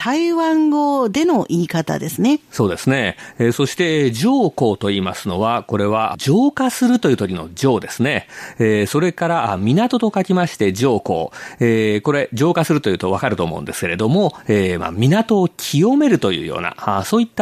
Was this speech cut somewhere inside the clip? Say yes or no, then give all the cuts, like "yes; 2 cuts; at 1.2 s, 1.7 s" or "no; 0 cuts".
no; 0 cuts